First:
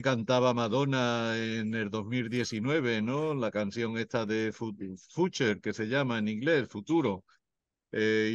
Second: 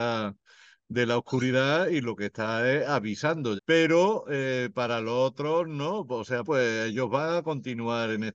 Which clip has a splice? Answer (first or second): second